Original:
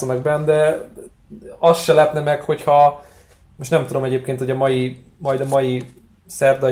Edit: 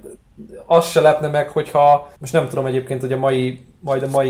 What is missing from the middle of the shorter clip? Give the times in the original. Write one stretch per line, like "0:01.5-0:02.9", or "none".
0:03.1-0:03.5